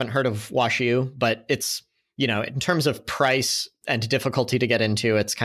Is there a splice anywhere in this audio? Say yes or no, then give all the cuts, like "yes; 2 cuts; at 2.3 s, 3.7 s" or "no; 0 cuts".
no; 0 cuts